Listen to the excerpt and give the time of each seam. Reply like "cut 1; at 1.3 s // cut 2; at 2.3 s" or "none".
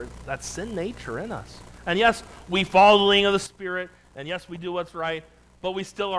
none